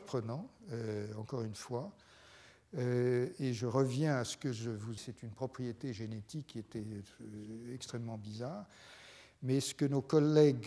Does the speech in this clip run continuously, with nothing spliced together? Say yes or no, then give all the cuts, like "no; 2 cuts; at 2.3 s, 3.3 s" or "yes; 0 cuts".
no; 1 cut; at 5.0 s